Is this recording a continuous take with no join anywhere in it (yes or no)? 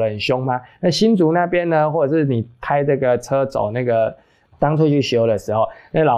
no